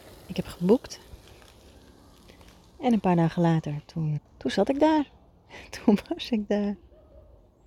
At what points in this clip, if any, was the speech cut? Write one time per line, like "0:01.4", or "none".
0:04.2